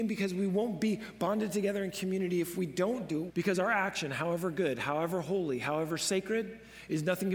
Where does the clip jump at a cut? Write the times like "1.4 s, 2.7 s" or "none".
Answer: 3.3 s